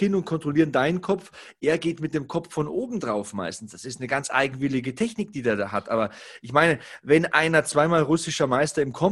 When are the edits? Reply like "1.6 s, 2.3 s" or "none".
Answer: none